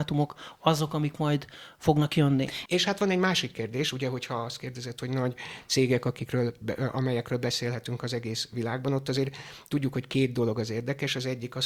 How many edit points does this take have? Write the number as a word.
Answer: one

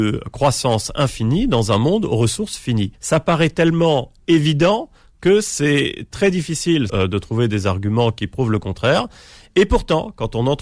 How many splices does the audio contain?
two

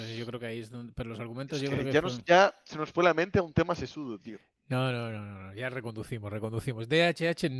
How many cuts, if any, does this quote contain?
zero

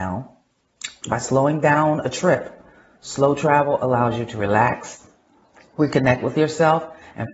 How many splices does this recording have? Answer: one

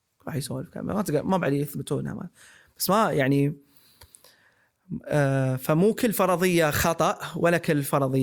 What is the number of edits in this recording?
zero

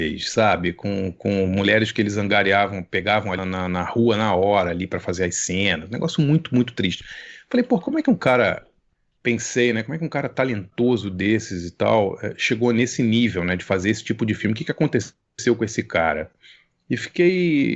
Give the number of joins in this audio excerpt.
one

